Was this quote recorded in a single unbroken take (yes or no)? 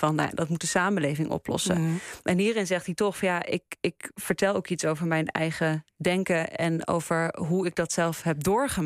yes